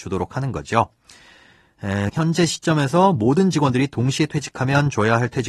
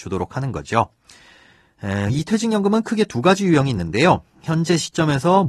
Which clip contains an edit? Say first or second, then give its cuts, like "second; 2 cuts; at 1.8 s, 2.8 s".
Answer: first; 1 cut; at 2.1 s